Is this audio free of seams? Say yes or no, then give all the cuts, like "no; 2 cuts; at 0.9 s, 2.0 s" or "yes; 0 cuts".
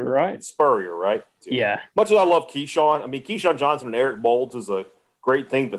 no; 1 cut; at 1.4 s